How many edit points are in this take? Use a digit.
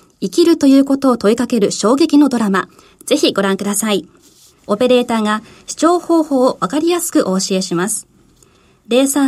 1